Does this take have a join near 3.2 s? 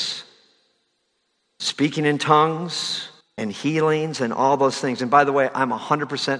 yes; 1 cut; at 3.2 s

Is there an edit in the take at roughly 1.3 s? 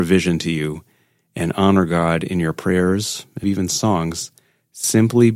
no; 1 cut; at 3.4 s

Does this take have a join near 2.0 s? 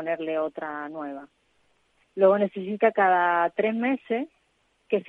yes; 1 cut; at 2.0 s

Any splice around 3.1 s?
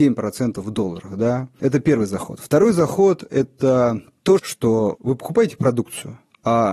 no; 2 cuts; at 1.6 s, 4.4 s

